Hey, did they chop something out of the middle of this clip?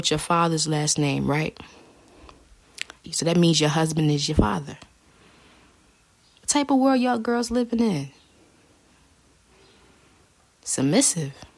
yes; 1 cut; at 3.0 s

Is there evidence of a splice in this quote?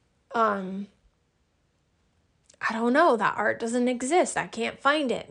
no; 0 cuts

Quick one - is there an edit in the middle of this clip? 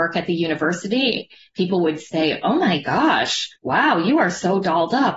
yes; 1 cut; at 3.6 s

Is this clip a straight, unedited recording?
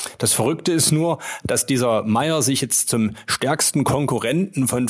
yes; 0 cuts

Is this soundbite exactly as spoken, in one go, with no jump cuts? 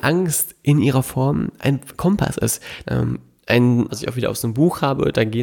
no; 2 cuts; at 2.8 s, 3.9 s

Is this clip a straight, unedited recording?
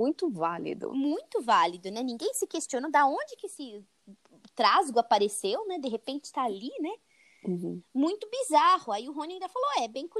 yes; 0 cuts

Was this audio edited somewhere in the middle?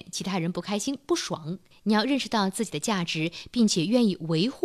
yes; 1 cut; at 1.7 s

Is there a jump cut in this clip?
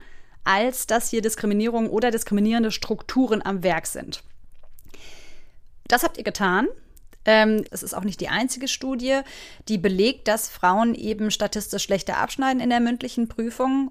yes; 1 cut; at 7.7 s

